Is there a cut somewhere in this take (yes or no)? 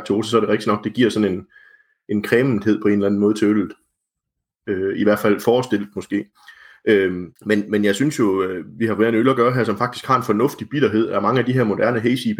yes